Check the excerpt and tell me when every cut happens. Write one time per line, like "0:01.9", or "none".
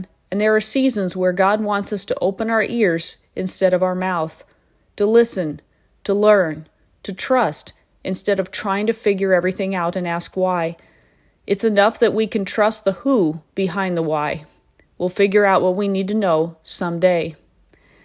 none